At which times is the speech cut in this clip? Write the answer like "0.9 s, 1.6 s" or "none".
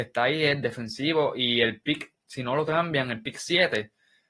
none